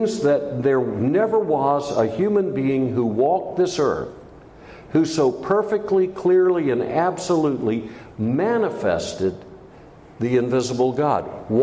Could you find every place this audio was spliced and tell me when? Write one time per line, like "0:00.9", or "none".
none

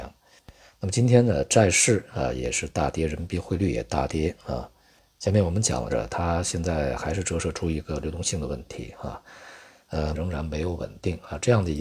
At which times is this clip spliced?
0:05.9
0:10.1

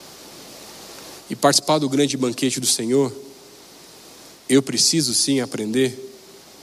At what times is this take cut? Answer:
0:01.3

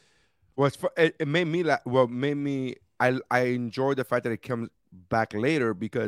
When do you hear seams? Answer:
none

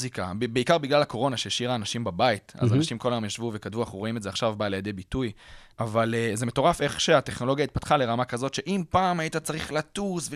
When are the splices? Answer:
0:05.7

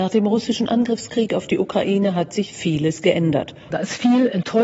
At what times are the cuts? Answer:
0:03.7

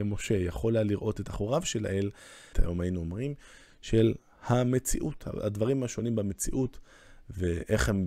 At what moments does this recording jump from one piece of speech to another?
0:02.5

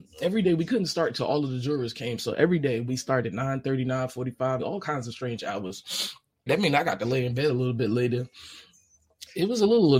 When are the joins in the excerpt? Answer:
0:04.6
0:06.5

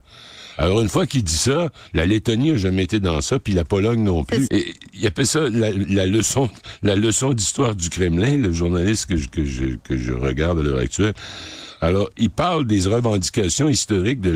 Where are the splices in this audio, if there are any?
0:04.5

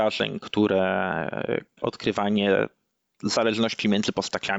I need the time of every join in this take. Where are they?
0:01.8

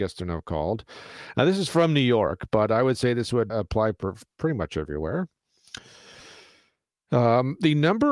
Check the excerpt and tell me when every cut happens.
0:03.5

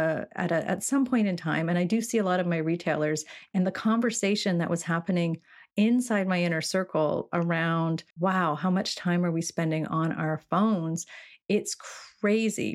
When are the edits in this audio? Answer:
0:08.1

